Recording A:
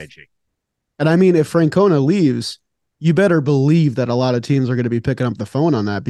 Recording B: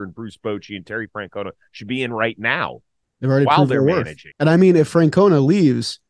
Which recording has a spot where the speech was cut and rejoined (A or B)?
B